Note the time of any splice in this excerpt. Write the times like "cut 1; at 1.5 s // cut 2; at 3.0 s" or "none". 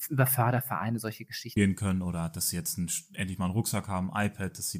cut 1; at 1.6 s